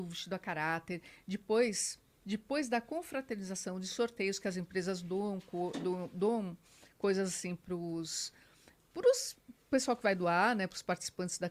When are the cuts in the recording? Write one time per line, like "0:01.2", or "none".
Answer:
none